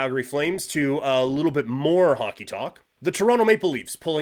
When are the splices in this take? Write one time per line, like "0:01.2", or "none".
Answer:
none